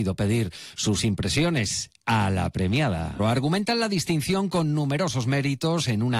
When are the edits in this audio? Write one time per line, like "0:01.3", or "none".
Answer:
0:03.2